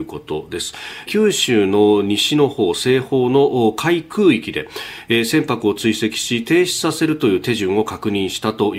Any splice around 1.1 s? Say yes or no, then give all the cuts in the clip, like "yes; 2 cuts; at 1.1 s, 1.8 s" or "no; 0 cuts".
yes; 1 cut; at 1.1 s